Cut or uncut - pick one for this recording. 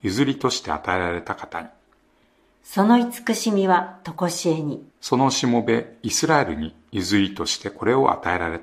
cut